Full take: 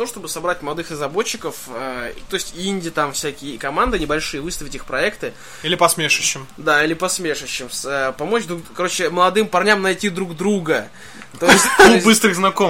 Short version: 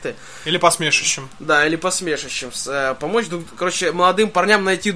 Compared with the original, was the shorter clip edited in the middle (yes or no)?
no